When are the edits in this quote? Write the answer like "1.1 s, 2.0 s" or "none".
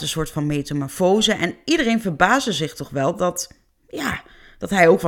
none